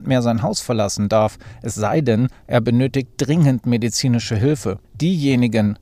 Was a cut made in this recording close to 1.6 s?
no; 1 cut; at 4.8 s

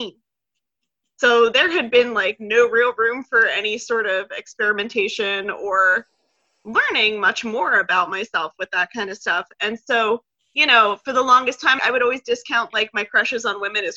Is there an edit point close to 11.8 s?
yes; 1 cut; at 11.8 s

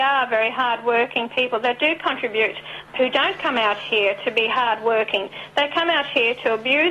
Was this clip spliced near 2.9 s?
yes; 1 cut; at 2.9 s

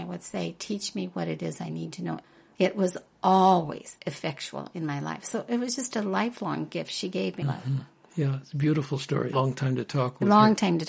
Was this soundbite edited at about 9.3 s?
yes; 2 cuts; at 7.4 s, 9.3 s

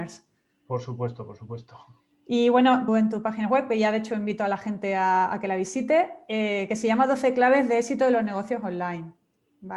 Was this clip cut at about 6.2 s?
no; 1 cut; at 2.9 s

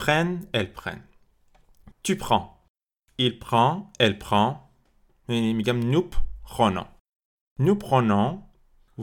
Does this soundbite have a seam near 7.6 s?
no; 2 cuts; at 1.9 s, 5.1 s

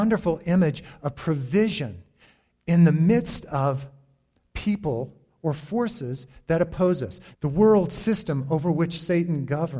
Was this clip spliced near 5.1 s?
no; 1 cut; at 7.3 s

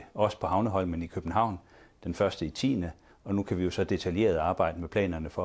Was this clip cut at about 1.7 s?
no; 1 cut; at 3.1 s

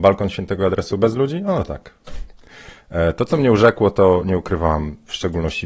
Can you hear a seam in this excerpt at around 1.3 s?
no; 0 cuts

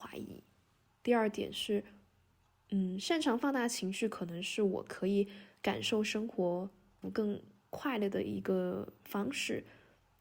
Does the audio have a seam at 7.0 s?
yes; 1 cut; at 7.0 s

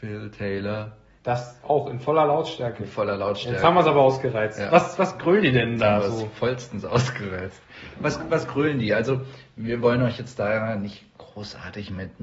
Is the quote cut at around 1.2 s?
yes; 1 cut; at 1.2 s

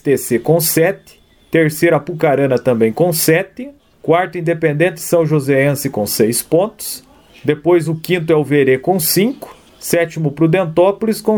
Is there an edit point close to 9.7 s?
yes; 1 cut; at 9.7 s

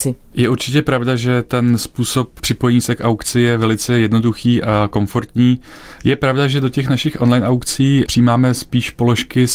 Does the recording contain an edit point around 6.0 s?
yes; 1 cut; at 6.0 s

